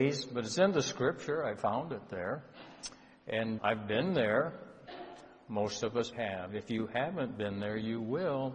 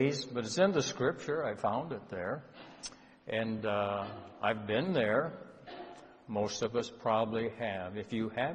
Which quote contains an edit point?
first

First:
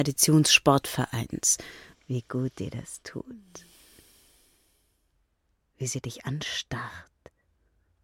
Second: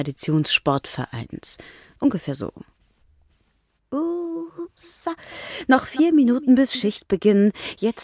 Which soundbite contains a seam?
first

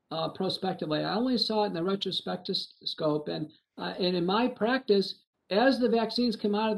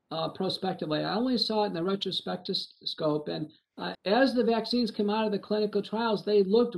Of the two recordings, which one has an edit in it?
second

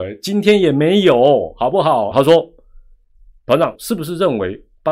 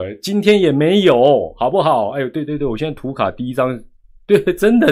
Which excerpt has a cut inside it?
first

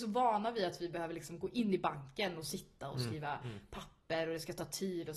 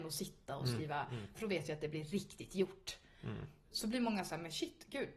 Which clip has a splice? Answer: second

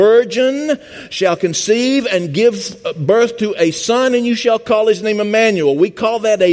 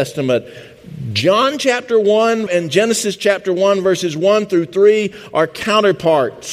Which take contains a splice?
second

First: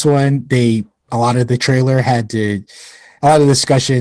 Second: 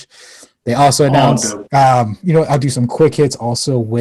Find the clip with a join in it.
second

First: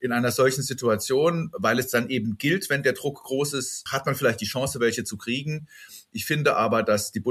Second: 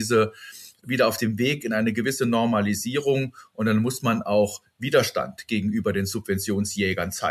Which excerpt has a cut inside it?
first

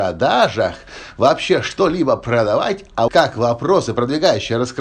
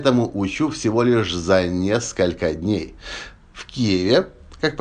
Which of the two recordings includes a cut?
first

